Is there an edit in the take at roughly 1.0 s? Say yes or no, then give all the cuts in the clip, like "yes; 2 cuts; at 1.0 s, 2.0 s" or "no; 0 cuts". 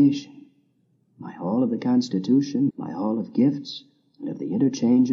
no; 1 cut; at 2.7 s